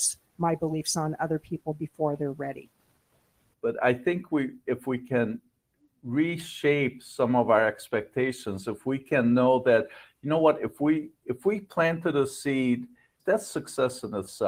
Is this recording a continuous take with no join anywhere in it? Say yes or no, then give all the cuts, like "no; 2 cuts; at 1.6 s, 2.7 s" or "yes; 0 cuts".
no; 2 cuts; at 3.5 s, 13.2 s